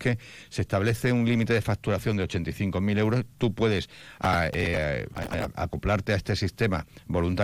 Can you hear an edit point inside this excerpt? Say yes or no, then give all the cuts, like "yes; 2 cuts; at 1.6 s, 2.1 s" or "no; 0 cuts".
no; 0 cuts